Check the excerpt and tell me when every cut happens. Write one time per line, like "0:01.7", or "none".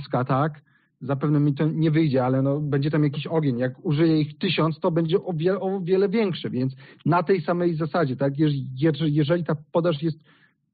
none